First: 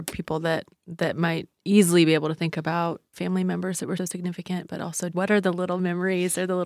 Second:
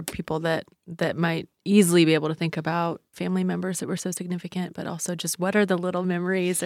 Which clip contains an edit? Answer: first; 2 cuts; at 4.0 s, 5.1 s

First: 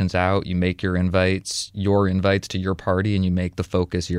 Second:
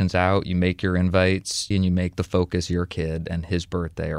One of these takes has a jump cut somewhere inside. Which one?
second; 1 cut; at 1.7 s

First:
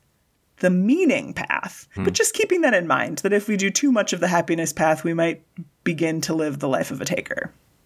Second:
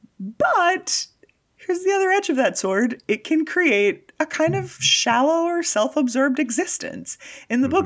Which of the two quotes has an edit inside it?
first; 1 cut; at 2.0 s

